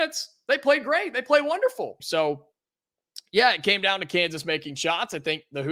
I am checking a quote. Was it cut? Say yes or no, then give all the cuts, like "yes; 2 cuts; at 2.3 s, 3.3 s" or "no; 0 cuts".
yes; 1 cut; at 2.0 s